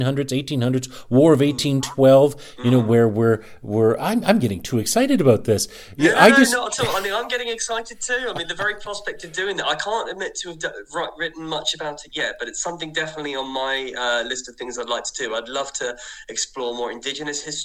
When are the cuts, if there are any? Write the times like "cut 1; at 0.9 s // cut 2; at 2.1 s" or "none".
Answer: none